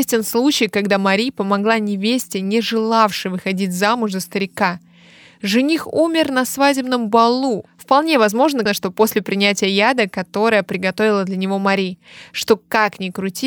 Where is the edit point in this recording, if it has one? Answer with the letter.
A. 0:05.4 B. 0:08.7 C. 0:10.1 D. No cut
B